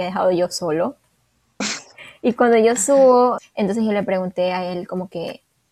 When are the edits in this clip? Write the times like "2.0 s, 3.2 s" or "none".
1.6 s, 3.4 s